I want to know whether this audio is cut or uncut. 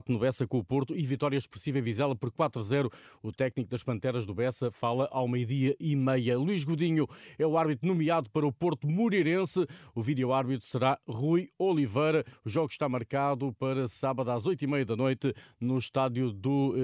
uncut